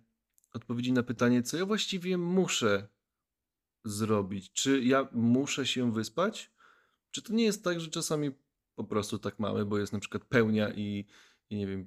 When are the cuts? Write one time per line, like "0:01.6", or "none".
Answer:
none